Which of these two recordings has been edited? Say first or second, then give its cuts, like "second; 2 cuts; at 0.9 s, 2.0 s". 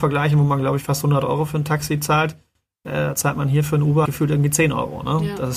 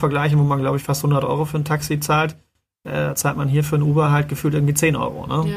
first; 1 cut; at 4.0 s